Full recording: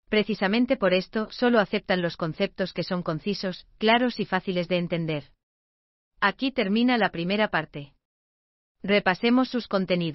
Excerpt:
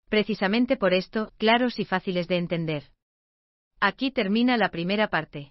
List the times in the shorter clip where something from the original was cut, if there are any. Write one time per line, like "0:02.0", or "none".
0:01.3